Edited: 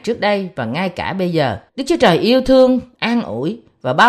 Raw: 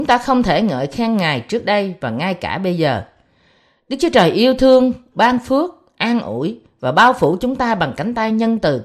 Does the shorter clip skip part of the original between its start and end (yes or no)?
yes